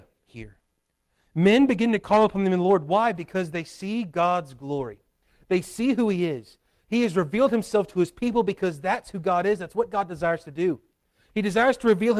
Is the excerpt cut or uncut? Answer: uncut